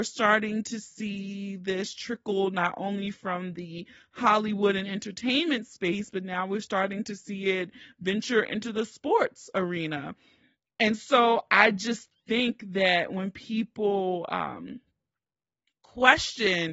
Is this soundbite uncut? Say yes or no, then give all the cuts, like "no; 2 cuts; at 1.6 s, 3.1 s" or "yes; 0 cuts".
yes; 0 cuts